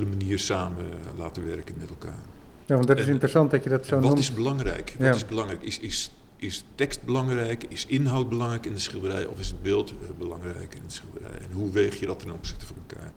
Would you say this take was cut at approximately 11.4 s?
no; 0 cuts

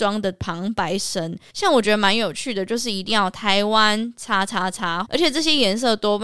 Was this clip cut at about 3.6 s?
no; 2 cuts; at 1.5 s, 5.0 s

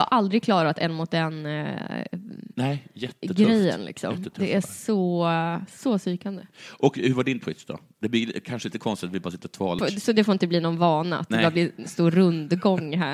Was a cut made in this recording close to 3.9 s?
no; 1 cut; at 9.8 s

